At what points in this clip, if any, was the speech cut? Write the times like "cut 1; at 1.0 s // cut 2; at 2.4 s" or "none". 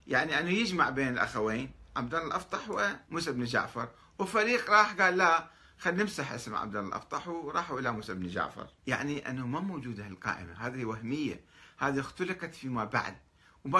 cut 1; at 3.0 s // cut 2; at 8.8 s